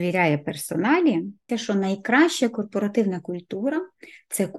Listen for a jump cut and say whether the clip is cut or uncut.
cut